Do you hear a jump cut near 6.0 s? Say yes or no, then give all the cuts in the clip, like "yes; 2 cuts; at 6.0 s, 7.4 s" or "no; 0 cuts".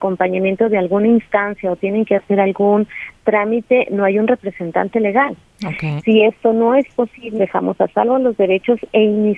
yes; 2 cuts; at 6.0 s, 7.4 s